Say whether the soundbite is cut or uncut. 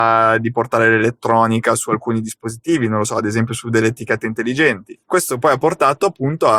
cut